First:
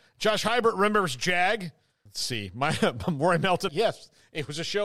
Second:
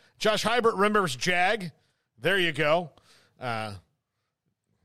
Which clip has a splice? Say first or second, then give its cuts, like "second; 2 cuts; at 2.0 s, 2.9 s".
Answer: first; 2 cuts; at 2.1 s, 3.7 s